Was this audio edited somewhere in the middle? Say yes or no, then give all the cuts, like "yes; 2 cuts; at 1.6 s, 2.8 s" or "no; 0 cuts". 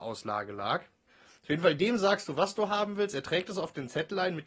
no; 0 cuts